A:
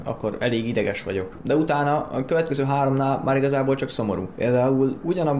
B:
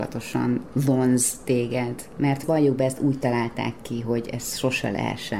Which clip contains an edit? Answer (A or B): A